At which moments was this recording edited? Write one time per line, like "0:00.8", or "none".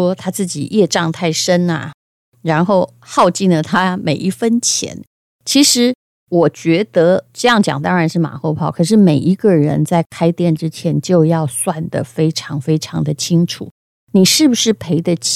none